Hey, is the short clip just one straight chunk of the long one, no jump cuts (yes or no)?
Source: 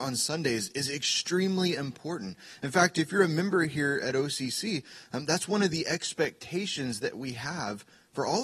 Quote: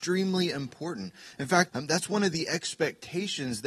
no